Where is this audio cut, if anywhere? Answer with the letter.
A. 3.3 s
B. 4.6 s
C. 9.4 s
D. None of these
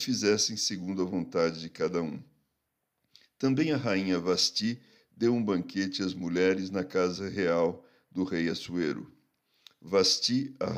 D